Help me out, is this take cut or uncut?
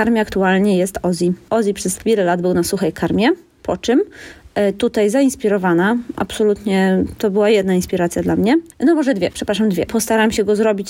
cut